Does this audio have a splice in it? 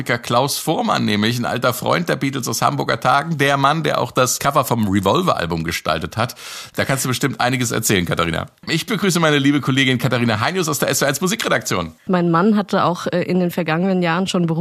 yes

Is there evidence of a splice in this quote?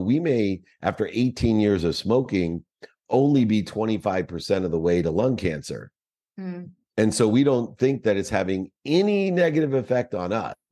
no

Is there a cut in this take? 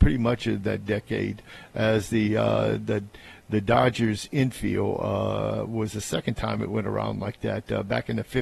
no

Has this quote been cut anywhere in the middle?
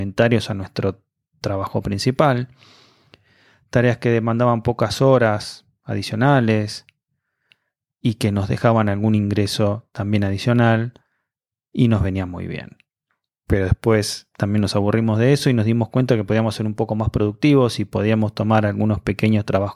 yes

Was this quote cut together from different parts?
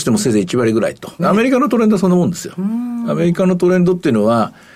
yes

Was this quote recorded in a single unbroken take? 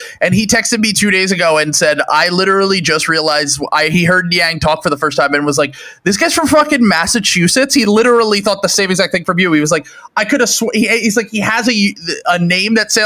yes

